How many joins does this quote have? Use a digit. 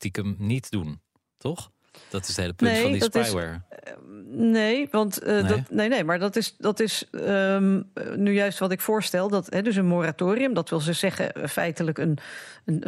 0